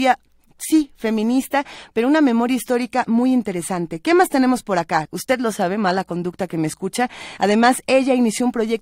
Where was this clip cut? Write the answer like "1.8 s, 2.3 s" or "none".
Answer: 5.0 s, 7.4 s